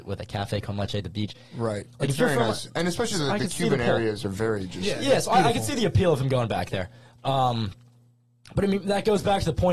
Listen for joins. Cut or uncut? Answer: uncut